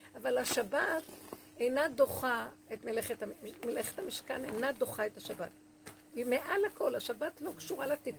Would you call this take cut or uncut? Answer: uncut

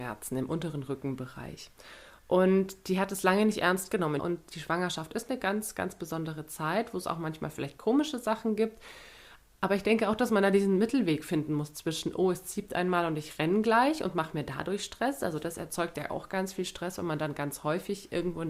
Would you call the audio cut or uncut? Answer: cut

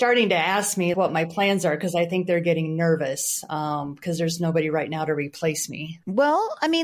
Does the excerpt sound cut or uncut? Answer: cut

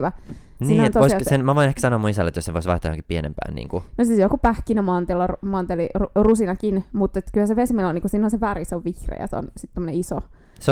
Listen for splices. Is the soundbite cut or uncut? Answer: uncut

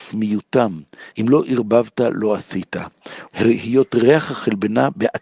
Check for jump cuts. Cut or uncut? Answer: cut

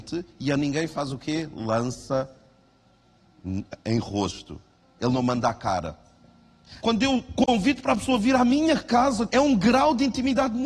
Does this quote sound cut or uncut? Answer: cut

